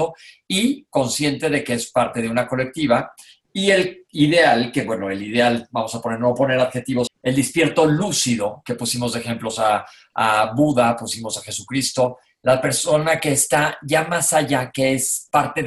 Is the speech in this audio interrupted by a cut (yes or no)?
yes